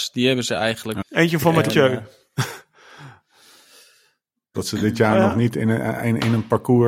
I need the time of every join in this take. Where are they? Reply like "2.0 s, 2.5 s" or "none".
1.0 s, 4.5 s